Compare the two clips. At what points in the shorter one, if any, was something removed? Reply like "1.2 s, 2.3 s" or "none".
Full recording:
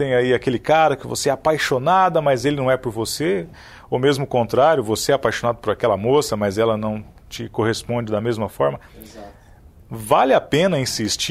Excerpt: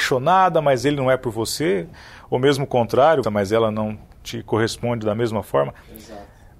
3.2 s